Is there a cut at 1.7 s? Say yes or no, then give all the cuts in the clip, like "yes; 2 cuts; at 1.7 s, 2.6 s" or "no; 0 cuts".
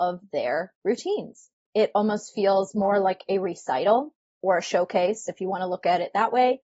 yes; 1 cut; at 1.7 s